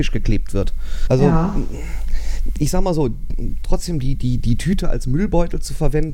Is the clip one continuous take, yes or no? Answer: no